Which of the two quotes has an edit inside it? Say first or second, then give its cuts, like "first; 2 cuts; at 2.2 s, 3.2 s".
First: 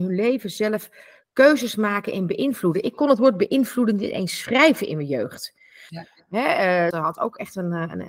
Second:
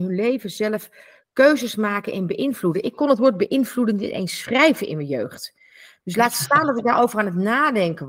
first; 2 cuts; at 5.9 s, 6.9 s